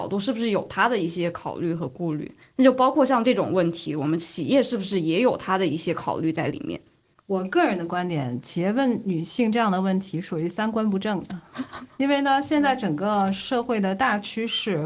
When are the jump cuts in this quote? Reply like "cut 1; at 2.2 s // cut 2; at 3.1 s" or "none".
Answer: cut 1; at 2.4 s